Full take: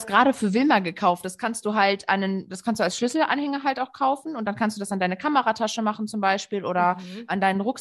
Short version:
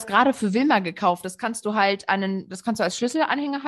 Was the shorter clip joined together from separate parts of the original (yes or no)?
no